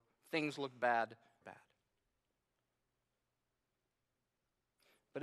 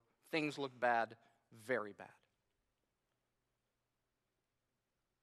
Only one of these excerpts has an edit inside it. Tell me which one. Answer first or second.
first